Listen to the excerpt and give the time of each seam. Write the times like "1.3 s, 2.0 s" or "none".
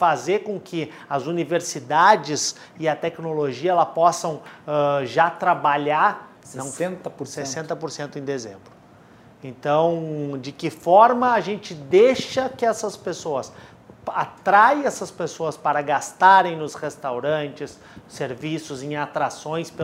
6.4 s